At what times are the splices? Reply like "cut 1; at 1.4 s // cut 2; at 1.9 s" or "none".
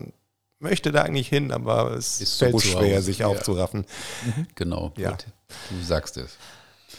cut 1; at 2.5 s // cut 2; at 4.5 s